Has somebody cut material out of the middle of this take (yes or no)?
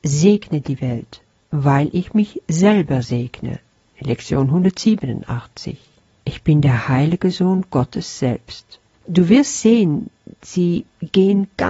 yes